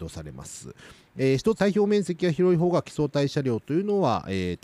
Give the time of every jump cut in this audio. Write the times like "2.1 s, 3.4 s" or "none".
1.6 s